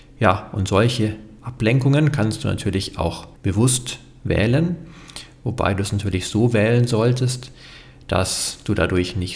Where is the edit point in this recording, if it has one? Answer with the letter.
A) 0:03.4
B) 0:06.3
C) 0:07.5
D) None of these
A